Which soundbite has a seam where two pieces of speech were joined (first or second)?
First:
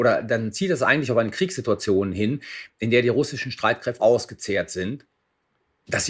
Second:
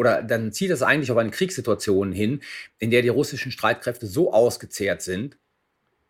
first